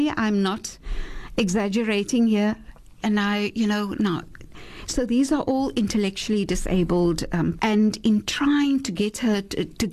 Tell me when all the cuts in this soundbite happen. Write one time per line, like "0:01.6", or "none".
0:03.0
0:07.6